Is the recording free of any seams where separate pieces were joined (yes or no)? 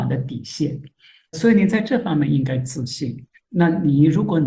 no